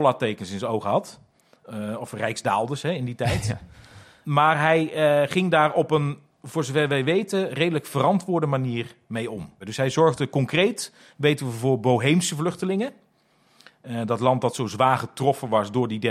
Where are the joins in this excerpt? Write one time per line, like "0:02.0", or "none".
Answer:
none